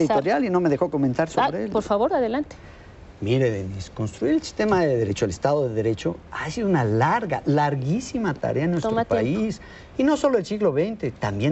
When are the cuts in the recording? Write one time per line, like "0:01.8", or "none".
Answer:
none

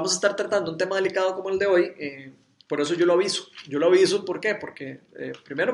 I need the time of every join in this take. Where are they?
none

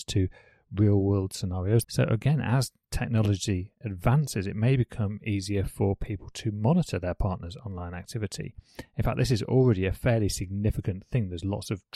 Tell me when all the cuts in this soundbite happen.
0:01.8

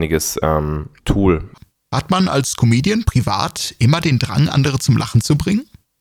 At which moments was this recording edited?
none

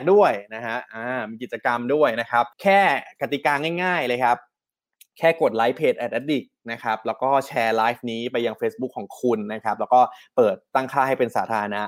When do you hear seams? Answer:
0:02.5

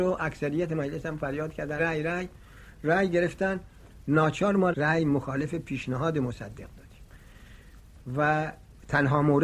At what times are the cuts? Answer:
0:01.8

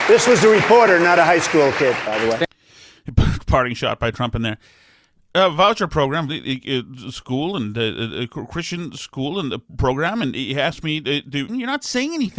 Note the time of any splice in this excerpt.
0:06.3
0:11.5

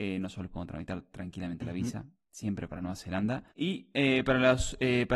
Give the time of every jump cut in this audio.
0:03.5

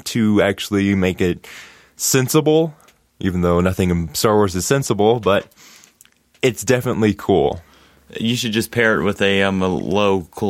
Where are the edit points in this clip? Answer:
none

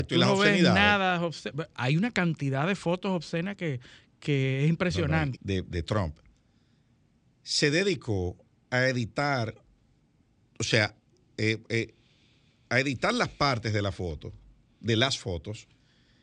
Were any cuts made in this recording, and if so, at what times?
0:05.3

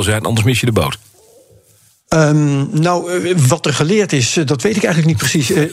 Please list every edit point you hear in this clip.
none

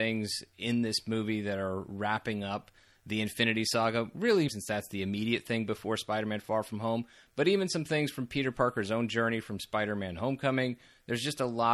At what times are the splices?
0:04.5

